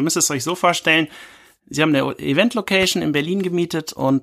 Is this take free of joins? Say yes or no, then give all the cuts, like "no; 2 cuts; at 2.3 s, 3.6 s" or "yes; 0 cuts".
yes; 0 cuts